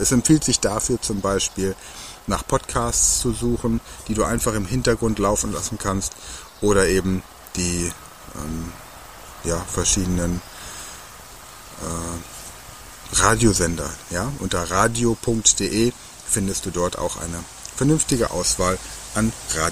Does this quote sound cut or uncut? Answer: uncut